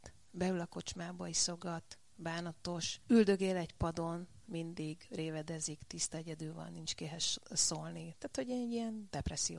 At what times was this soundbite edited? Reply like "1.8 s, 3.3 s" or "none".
none